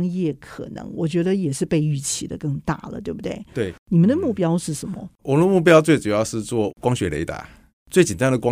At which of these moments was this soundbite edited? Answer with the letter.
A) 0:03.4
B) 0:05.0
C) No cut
C